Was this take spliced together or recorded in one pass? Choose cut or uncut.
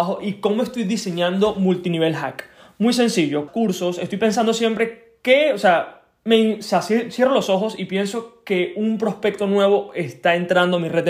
cut